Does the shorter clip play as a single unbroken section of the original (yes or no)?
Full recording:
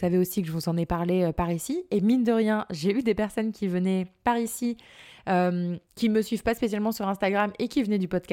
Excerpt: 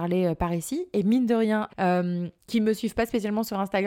no